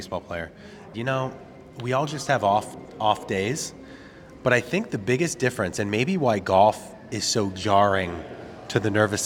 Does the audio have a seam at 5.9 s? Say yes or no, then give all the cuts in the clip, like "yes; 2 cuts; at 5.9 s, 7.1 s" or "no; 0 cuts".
no; 1 cut; at 0.9 s